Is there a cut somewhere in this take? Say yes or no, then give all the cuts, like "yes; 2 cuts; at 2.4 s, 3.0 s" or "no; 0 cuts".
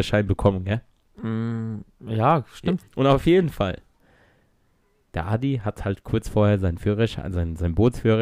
yes; 1 cut; at 2.8 s